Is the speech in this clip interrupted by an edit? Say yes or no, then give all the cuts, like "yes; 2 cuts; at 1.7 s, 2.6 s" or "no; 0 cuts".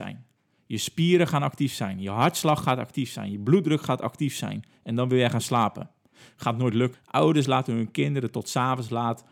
yes; 1 cut; at 6.9 s